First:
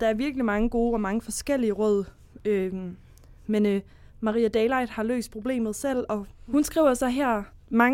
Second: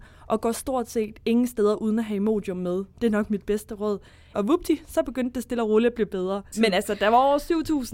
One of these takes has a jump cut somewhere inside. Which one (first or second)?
second